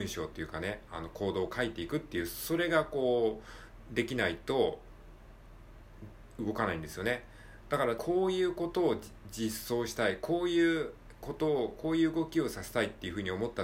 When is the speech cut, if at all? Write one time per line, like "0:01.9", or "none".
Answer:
0:08.0